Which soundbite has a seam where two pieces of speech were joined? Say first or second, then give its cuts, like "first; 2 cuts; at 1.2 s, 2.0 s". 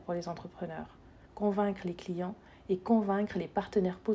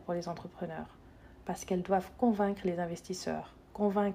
first; 1 cut; at 1.2 s